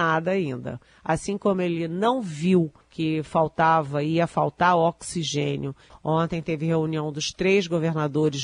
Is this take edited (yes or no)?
yes